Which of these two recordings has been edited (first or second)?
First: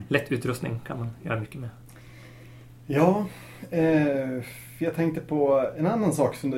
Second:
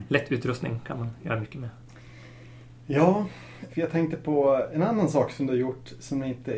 second